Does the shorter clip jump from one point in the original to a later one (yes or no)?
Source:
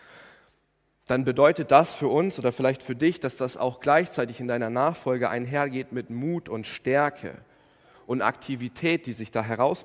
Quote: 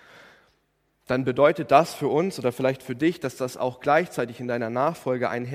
no